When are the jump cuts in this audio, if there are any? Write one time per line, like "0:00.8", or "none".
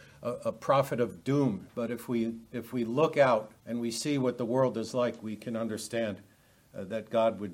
0:01.7
0:03.6